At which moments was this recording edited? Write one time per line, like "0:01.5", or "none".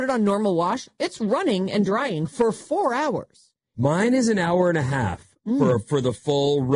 0:03.7